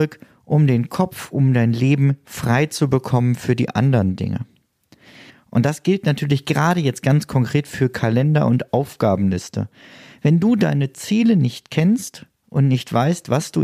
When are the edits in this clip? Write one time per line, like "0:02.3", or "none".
0:05.3